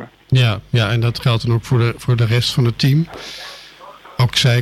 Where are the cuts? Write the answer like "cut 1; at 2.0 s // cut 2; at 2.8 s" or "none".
none